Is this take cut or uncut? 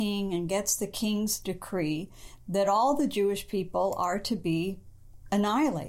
uncut